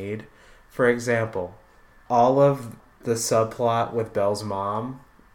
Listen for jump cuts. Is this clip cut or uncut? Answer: uncut